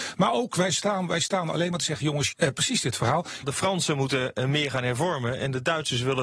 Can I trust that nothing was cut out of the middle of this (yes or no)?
no